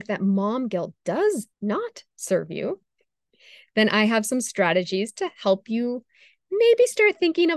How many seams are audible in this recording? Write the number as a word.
one